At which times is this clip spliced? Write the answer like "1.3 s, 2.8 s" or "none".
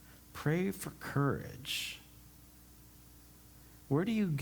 none